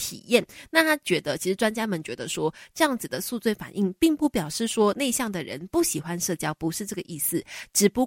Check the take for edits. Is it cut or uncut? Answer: uncut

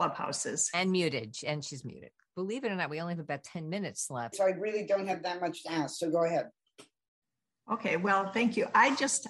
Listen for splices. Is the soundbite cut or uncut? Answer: cut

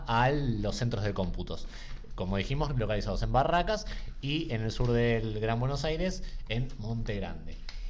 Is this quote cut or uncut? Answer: uncut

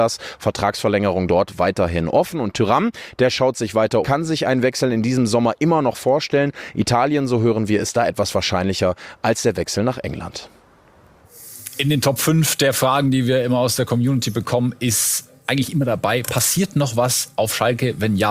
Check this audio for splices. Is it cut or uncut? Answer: cut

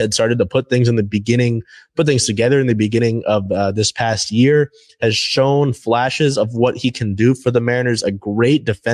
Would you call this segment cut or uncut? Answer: uncut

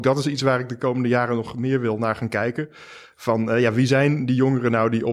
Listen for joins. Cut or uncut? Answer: uncut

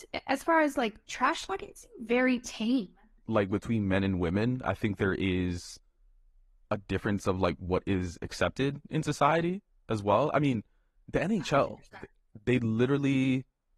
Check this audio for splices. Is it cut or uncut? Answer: uncut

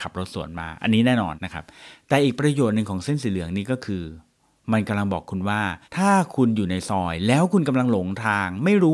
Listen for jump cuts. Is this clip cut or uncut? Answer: cut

